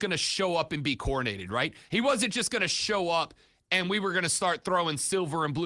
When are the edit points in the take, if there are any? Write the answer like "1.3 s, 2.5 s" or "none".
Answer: none